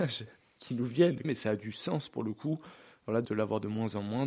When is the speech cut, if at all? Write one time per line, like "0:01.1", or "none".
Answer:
0:01.2
0:03.2